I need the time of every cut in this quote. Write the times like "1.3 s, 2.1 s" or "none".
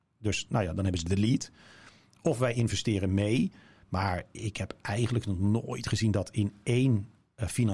none